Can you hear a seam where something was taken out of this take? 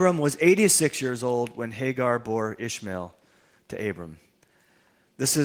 no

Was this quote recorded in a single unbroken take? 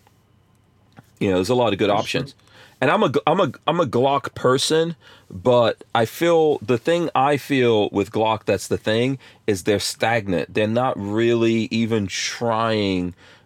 yes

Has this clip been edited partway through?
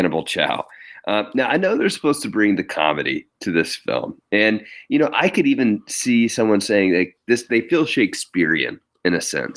no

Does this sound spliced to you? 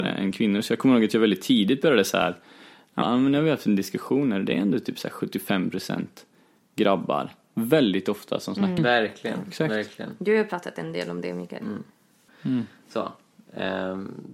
yes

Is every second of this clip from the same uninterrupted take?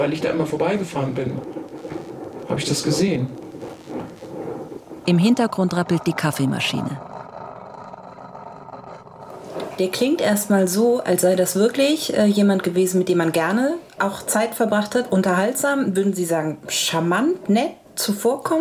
no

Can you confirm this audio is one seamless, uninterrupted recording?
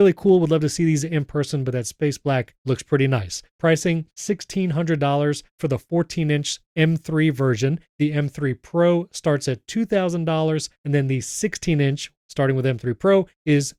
yes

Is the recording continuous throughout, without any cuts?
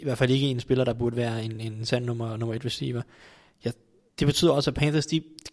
yes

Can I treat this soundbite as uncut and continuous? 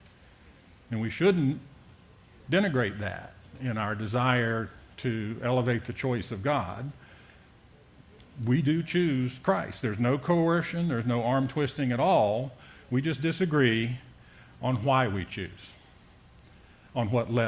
yes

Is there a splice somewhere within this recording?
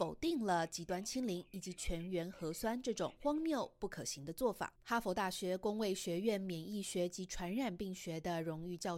yes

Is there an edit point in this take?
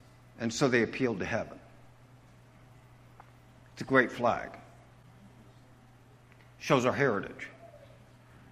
no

